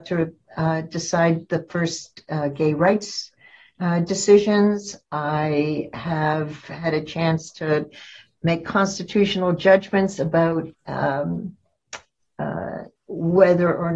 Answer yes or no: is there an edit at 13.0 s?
yes